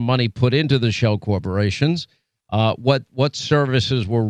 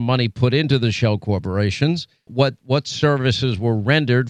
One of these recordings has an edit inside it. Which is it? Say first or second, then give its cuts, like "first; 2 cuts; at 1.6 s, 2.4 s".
second; 1 cut; at 2.3 s